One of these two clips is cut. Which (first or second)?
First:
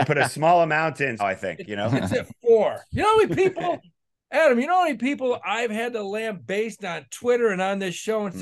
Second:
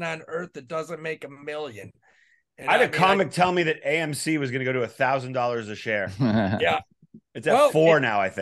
first